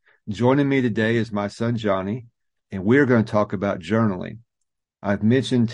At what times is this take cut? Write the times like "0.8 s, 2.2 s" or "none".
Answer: none